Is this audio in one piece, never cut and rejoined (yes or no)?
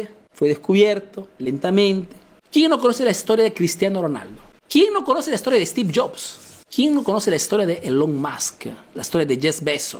no